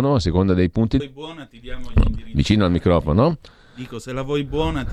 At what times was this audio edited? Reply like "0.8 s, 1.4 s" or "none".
1.0 s